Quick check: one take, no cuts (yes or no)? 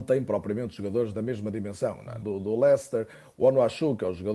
no